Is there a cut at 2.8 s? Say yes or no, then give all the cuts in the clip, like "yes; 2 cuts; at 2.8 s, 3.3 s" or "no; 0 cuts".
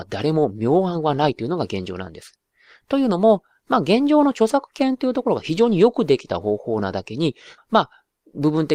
no; 1 cut; at 7.6 s